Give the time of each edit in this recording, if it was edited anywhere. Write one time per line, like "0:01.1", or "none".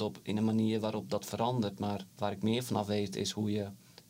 0:02.1